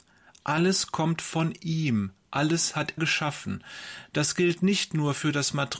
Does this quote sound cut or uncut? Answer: cut